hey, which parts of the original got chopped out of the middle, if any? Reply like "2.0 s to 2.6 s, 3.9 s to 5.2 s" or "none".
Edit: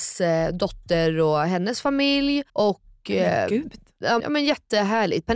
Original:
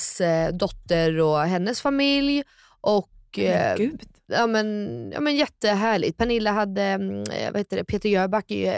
2.5 s to 2.8 s, 4.5 s to 5.1 s